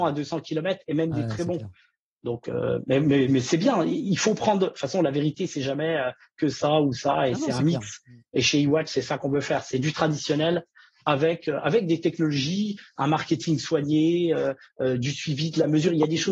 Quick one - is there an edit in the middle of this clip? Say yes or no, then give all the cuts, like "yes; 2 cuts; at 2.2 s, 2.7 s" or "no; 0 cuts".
no; 0 cuts